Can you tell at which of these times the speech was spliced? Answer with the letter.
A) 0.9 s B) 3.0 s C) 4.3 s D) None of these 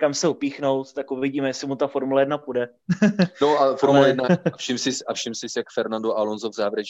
C